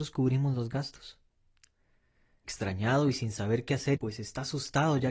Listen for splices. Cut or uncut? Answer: cut